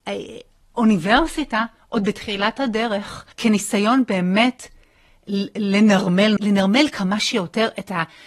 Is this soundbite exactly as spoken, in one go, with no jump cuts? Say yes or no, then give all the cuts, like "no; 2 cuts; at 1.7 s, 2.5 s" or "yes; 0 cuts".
no; 2 cuts; at 3.3 s, 6.4 s